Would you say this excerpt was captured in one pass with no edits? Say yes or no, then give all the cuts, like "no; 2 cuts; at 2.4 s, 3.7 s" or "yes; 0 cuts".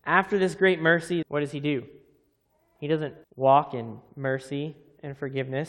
no; 2 cuts; at 1.2 s, 3.2 s